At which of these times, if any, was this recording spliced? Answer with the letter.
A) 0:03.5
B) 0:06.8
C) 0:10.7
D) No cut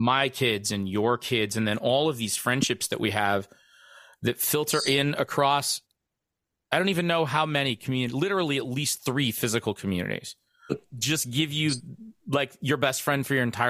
C